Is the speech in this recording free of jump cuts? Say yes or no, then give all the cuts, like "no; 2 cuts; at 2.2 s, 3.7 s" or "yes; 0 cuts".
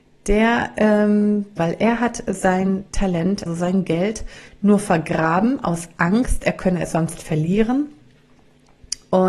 no; 2 cuts; at 1.6 s, 3.5 s